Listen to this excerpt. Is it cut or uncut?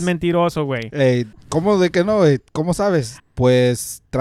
cut